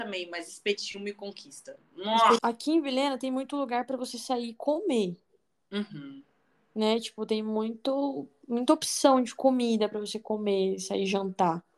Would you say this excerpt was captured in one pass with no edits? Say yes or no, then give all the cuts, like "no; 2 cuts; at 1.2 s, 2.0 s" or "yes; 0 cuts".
no; 1 cut; at 2.4 s